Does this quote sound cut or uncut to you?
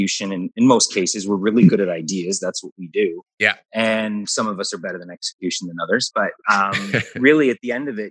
cut